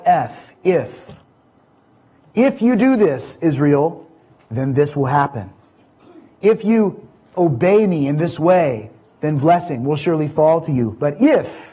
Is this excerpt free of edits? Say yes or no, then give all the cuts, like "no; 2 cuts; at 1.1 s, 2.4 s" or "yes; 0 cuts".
yes; 0 cuts